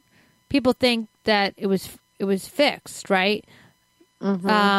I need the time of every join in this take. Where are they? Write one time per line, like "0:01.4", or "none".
none